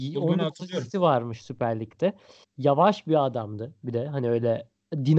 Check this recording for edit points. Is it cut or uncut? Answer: cut